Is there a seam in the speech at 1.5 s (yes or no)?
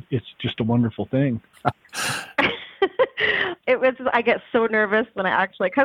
yes